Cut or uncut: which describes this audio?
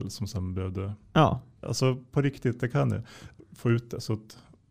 cut